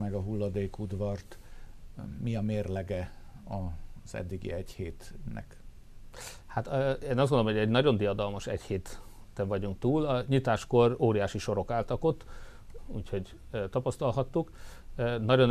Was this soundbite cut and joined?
yes; 1 cut; at 12.8 s

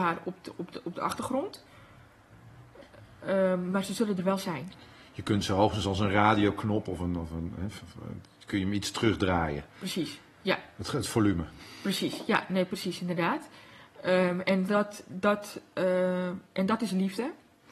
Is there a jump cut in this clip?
no; 0 cuts

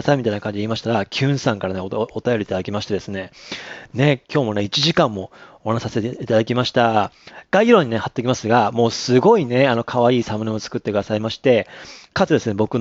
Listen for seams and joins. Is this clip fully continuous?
yes; 0 cuts

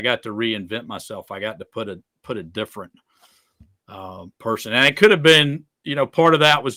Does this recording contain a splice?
no; 0 cuts

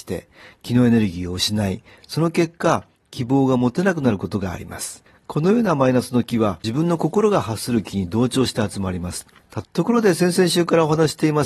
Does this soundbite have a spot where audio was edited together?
yes; 1 cut; at 9.6 s

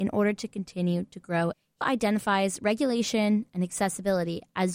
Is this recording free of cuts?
no; 1 cut; at 1.8 s

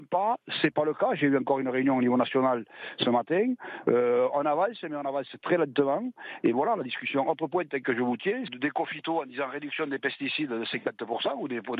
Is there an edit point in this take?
yes; 1 cut; at 8.5 s

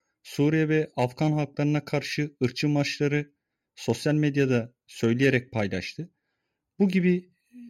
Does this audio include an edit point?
no; 0 cuts

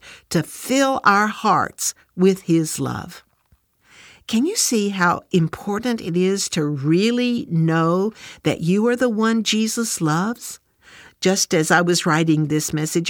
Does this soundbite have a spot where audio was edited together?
no; 0 cuts

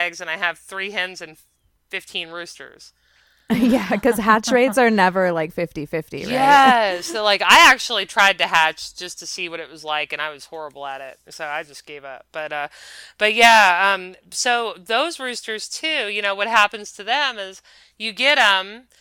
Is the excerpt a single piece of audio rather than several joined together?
yes; 0 cuts

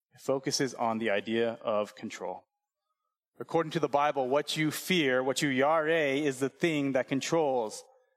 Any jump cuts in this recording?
no; 0 cuts

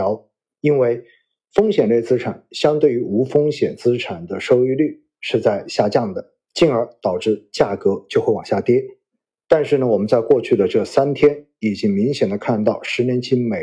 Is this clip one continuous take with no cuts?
no; 1 cut; at 6.5 s

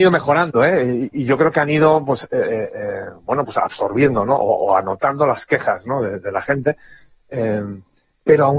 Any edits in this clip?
no; 0 cuts

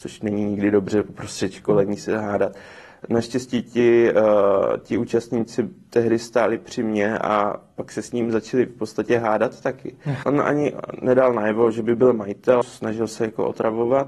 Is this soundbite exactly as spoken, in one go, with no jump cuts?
no; 2 cuts; at 10.2 s, 12.6 s

